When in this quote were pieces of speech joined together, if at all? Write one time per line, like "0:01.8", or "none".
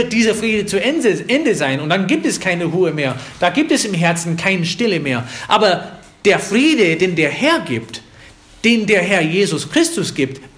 none